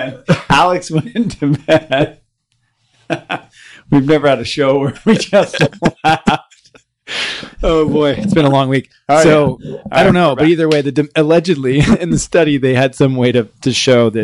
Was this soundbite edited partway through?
no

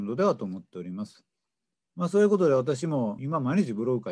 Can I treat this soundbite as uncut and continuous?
no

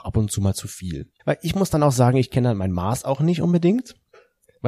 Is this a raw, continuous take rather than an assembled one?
no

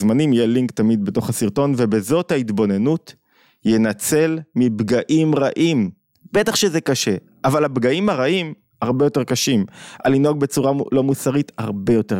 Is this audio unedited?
yes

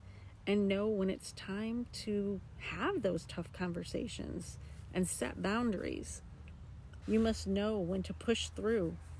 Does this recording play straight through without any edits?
no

